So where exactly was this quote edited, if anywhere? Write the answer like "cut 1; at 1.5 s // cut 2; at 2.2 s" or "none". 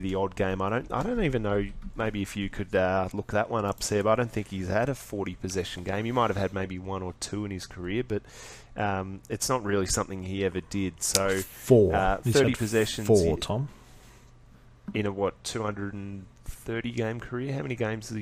cut 1; at 16.3 s